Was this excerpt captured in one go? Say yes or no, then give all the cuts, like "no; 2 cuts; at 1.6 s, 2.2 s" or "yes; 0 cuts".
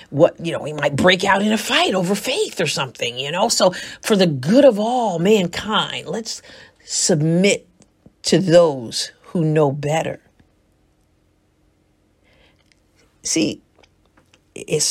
yes; 0 cuts